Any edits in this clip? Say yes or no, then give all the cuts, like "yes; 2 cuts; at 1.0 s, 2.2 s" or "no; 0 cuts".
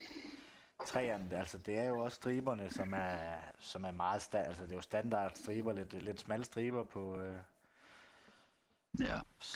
no; 0 cuts